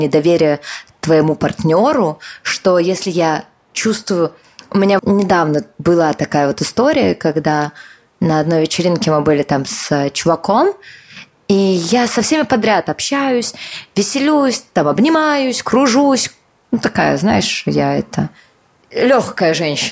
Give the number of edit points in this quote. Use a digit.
1